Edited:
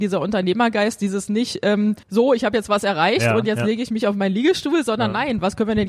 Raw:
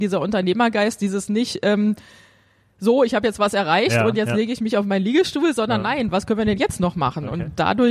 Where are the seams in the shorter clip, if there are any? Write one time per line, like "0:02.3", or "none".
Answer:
0:02.0